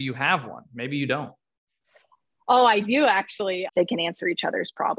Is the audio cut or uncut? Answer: cut